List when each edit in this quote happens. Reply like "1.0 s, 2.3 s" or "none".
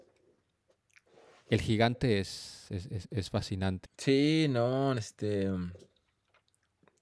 3.9 s, 5.0 s